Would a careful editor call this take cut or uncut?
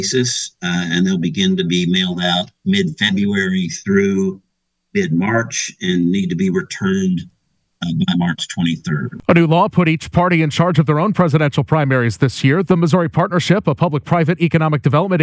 cut